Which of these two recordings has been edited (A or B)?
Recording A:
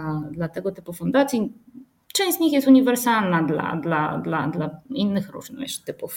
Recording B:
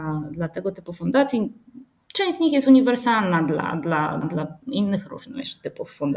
B